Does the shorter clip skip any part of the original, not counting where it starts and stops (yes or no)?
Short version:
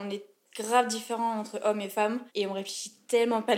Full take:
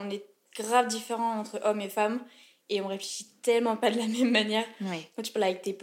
yes